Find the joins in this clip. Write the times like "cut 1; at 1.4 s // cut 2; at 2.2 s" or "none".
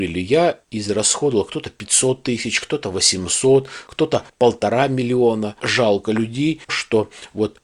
cut 1; at 5.6 s // cut 2; at 6.7 s